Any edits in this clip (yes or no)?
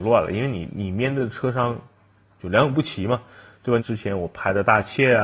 yes